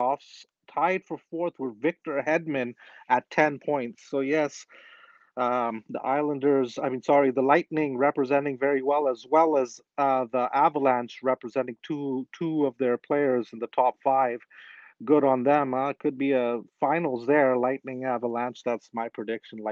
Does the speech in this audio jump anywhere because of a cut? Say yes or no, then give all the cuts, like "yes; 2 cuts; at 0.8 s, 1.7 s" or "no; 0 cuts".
no; 0 cuts